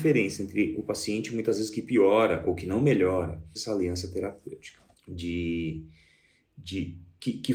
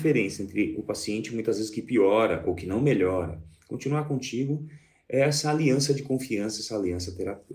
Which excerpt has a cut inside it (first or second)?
first